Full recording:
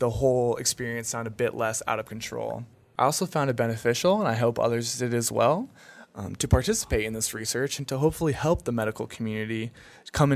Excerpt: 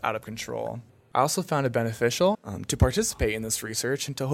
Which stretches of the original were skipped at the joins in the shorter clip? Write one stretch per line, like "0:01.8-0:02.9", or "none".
0:04.2-0:06.1